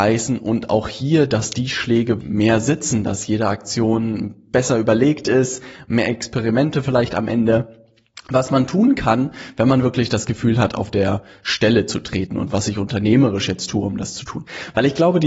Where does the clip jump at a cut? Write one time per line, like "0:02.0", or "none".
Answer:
0:02.2